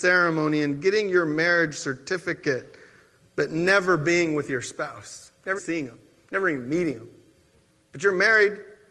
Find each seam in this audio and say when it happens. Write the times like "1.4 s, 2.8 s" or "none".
5.6 s

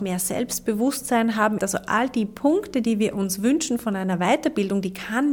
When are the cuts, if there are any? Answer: 1.6 s

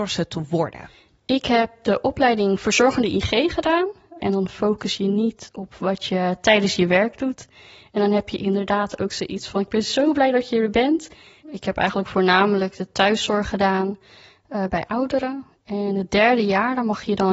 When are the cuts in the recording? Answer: 4.2 s, 11.4 s

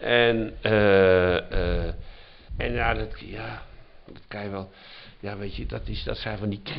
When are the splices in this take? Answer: 2.5 s

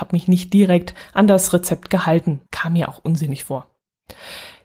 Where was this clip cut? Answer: 2.5 s

